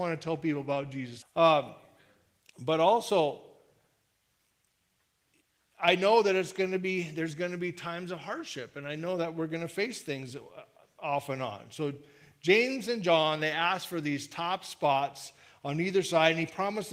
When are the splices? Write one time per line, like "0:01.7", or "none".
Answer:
0:01.2

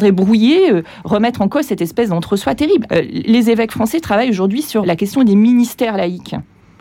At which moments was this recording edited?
0:02.9
0:04.8

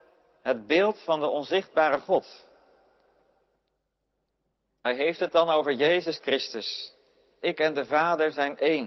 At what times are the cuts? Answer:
0:07.4

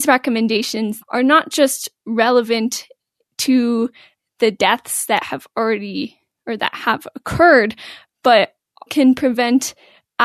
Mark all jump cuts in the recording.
0:01.0
0:08.9

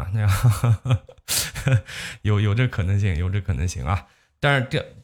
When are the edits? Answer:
none

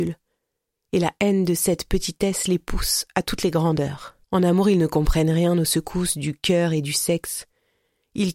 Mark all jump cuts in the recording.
0:04.2

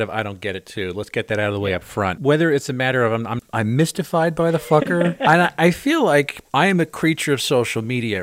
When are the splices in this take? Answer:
0:03.4

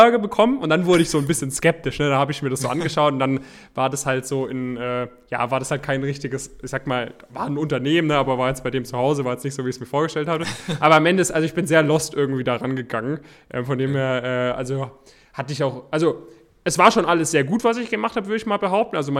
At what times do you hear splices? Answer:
none

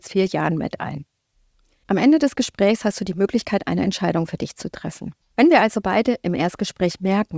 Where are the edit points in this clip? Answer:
0:05.2

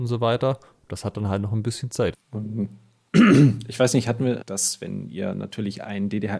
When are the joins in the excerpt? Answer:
0:02.1
0:04.4

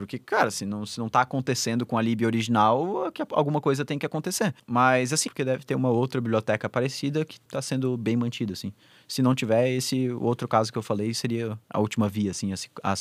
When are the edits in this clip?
0:05.3

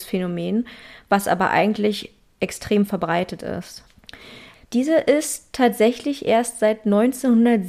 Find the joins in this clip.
0:04.5

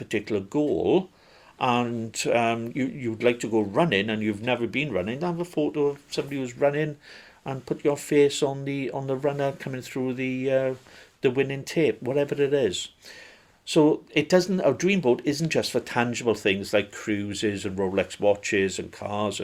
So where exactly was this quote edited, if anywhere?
none

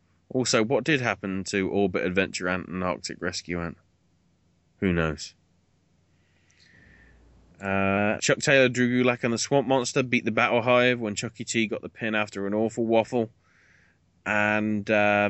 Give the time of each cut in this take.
0:08.2

